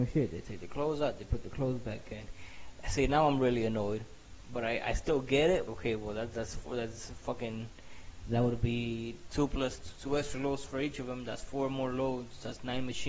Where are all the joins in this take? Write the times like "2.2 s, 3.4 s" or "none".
5.7 s